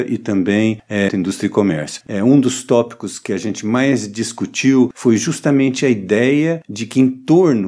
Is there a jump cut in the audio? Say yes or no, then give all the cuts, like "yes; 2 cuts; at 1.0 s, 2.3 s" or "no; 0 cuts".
yes; 1 cut; at 1.1 s